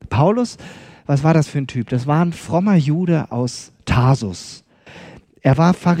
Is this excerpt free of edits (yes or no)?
yes